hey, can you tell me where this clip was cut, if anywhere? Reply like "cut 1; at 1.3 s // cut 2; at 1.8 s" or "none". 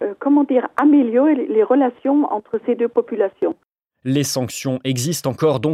none

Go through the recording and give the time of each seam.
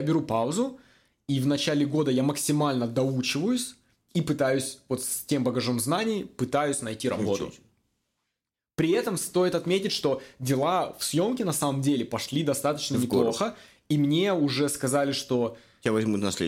none

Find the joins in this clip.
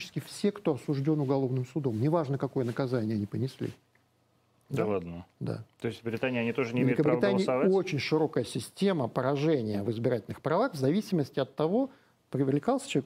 none

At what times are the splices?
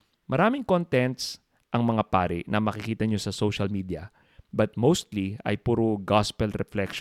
none

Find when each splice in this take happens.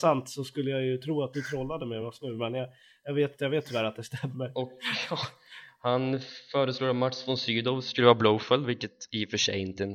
none

